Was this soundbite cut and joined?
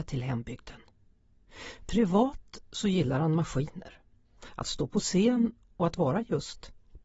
no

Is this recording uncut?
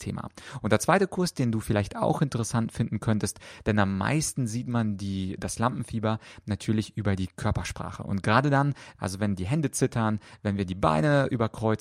no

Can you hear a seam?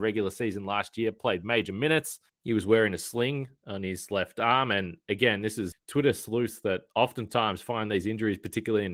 yes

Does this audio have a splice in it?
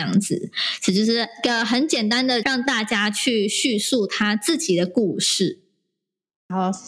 yes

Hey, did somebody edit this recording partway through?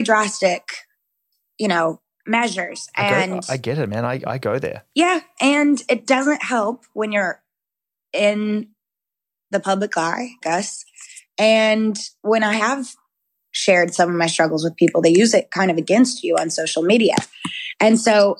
yes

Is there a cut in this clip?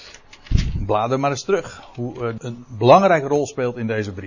yes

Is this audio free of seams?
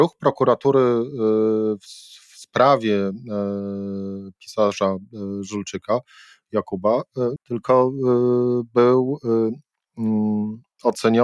no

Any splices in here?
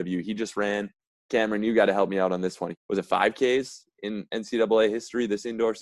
yes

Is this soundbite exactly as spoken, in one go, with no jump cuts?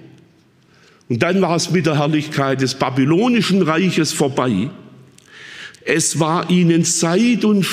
no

